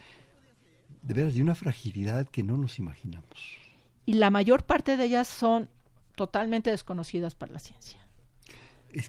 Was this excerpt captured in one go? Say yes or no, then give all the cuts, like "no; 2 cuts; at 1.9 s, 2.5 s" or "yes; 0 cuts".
no; 1 cut; at 3.9 s